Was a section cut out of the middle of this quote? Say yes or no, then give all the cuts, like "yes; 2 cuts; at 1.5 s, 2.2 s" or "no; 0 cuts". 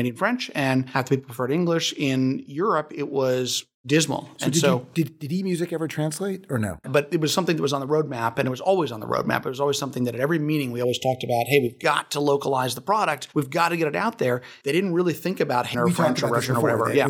yes; 3 cuts; at 6.8 s, 14.6 s, 15.7 s